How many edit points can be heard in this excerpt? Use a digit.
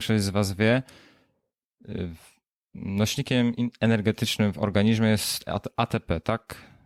0